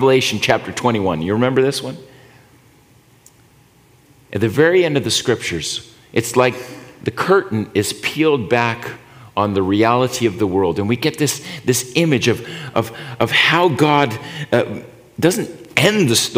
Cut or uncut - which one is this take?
uncut